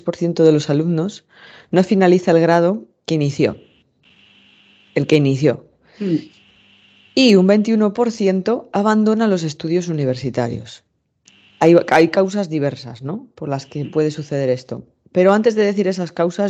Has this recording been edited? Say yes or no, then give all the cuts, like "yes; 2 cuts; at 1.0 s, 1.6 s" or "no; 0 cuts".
no; 0 cuts